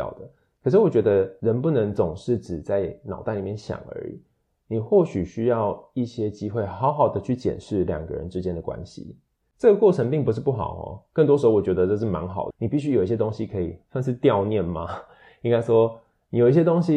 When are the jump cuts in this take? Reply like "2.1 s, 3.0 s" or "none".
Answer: 9.4 s, 12.5 s